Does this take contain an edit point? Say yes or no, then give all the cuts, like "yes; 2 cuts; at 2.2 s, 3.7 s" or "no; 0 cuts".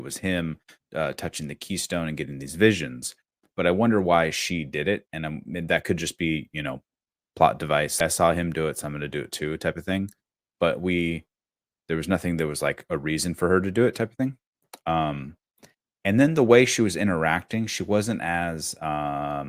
yes; 1 cut; at 8.0 s